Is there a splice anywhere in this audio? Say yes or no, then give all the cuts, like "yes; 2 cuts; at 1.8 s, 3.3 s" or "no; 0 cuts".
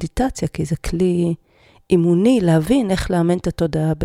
no; 0 cuts